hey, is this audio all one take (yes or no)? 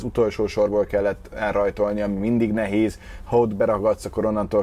yes